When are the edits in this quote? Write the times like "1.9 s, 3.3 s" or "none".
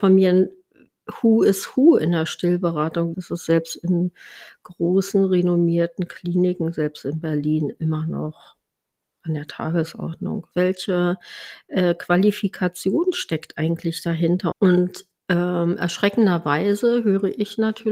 3.1 s, 10.5 s, 14.5 s

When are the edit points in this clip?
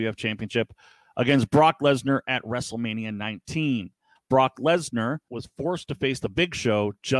4.2 s, 5.3 s

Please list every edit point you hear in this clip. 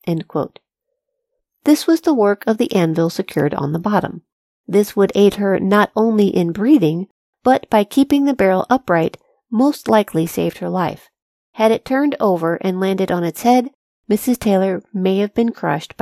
none

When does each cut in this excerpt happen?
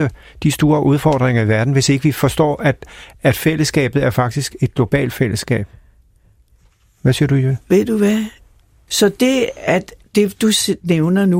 8.9 s, 10.0 s

